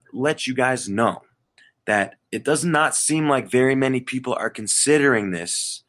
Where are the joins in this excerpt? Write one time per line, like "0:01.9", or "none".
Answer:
none